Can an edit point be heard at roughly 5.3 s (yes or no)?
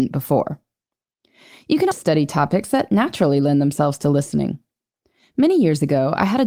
no